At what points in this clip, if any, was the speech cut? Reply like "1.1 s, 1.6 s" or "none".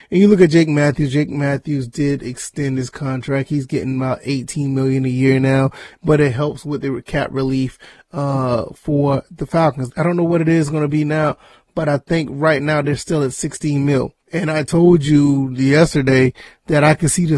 9.9 s, 14.2 s